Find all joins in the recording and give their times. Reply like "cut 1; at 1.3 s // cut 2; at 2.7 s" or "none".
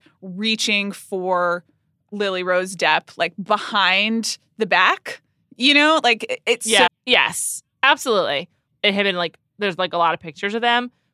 cut 1; at 6.9 s // cut 2; at 8.7 s